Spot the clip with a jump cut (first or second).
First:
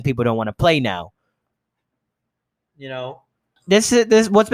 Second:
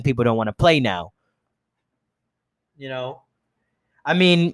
first